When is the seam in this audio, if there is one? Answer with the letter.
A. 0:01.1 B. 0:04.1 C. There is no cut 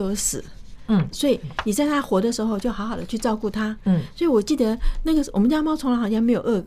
A